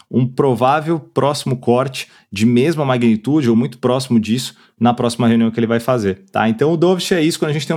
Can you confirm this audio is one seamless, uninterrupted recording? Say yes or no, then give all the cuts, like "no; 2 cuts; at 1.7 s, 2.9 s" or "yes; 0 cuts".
yes; 0 cuts